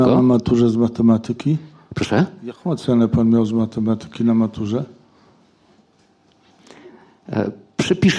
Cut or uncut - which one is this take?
uncut